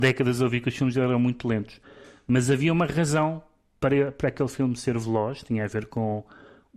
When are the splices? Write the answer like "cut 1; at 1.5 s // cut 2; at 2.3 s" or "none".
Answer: none